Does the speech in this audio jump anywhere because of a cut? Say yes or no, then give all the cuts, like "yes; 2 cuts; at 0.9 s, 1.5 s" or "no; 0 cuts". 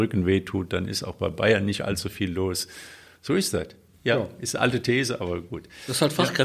no; 0 cuts